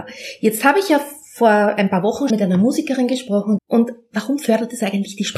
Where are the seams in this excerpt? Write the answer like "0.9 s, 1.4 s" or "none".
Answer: 2.3 s, 3.6 s